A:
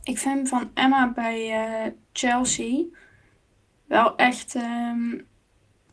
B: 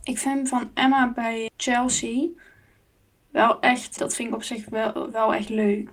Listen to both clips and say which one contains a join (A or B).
B